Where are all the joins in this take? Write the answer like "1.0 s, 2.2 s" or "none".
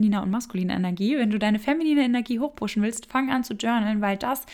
none